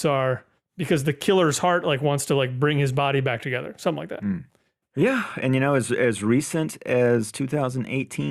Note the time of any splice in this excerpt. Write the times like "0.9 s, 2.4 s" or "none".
4.8 s